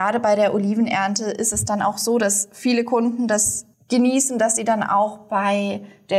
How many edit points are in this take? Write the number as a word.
one